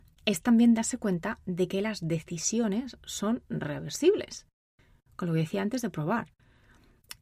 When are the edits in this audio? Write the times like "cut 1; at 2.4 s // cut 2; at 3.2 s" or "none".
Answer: none